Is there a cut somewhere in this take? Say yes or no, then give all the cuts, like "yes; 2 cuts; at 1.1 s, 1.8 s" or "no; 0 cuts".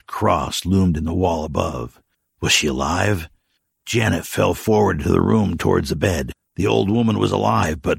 no; 0 cuts